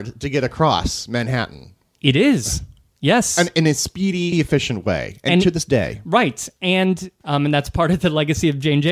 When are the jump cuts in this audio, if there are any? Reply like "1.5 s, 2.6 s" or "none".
4.3 s